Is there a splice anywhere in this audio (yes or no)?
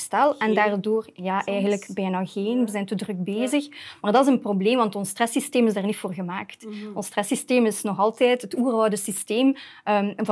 no